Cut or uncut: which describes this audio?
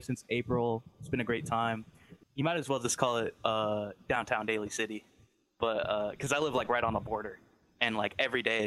cut